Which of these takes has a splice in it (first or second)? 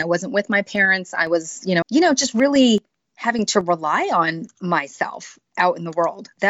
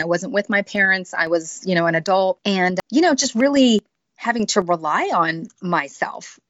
first